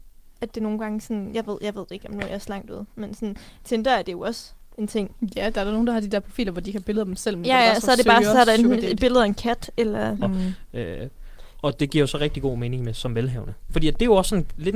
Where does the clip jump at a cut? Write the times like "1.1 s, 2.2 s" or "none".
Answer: 10.2 s, 13.7 s